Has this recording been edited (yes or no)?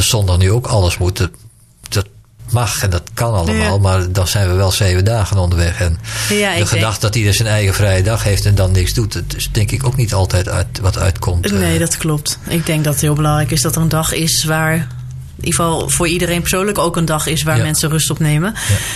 no